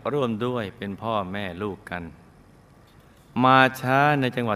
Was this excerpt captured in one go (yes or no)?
yes